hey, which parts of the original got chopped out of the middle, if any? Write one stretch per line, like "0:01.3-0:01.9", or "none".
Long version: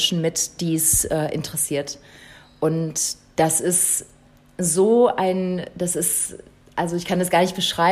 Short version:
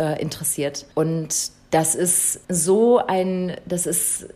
0:02.0-0:02.6
0:04.1-0:04.5